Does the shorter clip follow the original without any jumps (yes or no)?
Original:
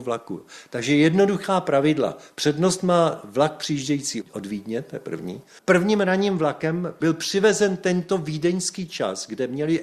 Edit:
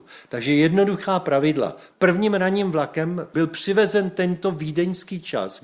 no